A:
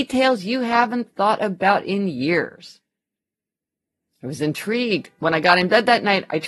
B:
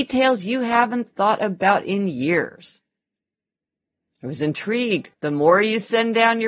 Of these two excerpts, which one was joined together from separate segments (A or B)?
B